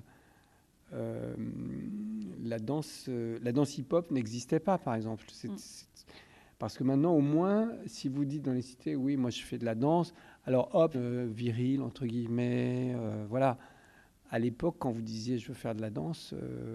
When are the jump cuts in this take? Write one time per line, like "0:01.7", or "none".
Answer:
0:10.9